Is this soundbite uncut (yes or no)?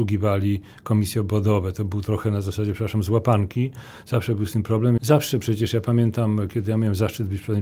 no